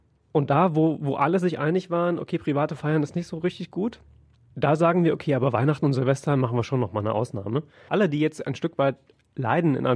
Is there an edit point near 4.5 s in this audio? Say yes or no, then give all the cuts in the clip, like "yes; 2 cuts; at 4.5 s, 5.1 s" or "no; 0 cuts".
yes; 2 cuts; at 4.5 s, 7.9 s